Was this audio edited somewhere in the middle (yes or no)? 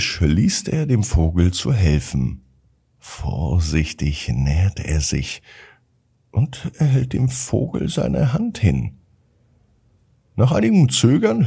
no